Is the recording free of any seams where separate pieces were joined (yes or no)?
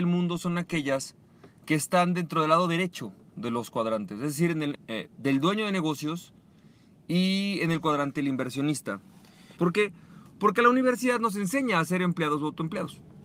no